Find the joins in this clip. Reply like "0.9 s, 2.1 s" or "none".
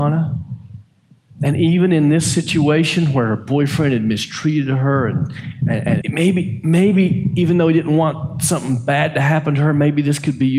6.0 s